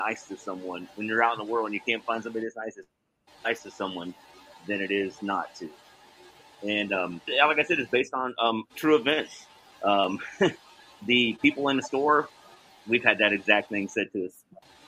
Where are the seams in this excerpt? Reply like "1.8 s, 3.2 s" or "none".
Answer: 7.3 s